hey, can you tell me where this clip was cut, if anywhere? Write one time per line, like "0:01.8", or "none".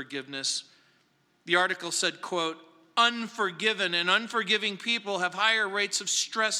none